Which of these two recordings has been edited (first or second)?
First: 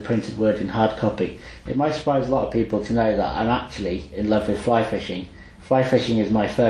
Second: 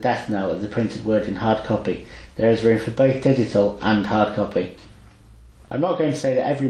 first